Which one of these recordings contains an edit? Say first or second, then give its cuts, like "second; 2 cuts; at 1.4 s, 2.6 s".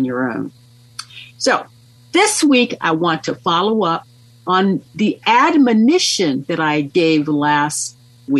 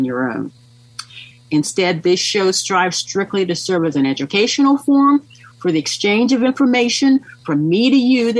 second; 1 cut; at 1.3 s